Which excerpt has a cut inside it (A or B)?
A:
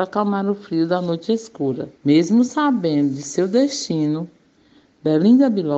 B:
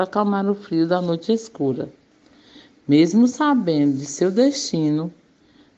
A